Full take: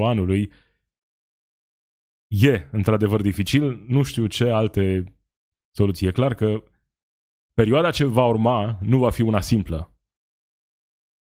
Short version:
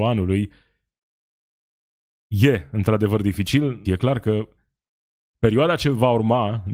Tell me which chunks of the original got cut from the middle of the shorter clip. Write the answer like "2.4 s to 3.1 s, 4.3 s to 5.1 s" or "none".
3.9 s to 6.0 s